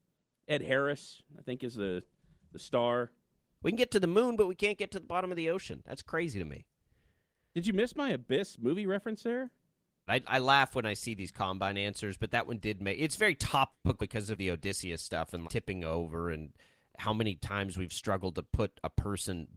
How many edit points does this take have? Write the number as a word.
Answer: three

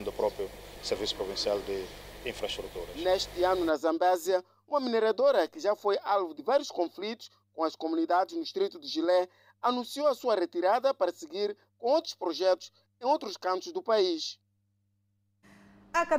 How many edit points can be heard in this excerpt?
zero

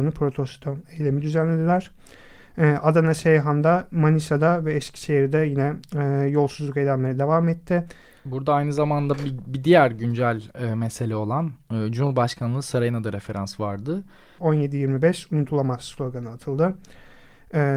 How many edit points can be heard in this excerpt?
one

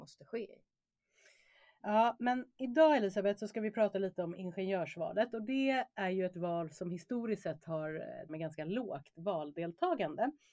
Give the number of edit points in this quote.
one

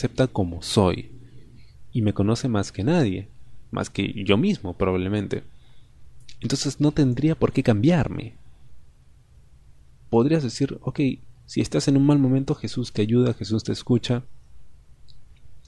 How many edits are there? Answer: zero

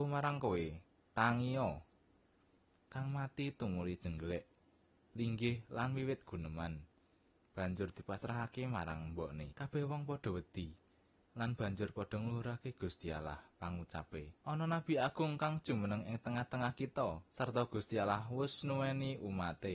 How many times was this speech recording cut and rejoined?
three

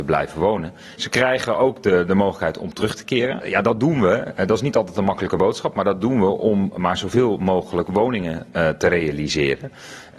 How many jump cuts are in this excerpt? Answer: two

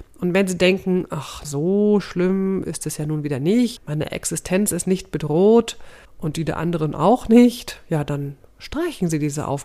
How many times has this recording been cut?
three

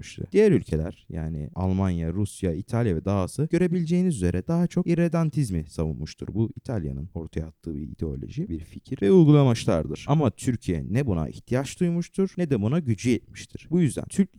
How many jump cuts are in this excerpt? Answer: zero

